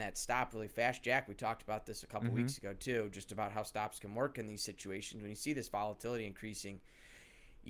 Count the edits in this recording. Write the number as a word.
zero